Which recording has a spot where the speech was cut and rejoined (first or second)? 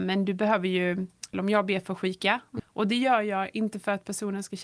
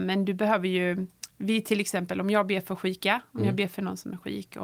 first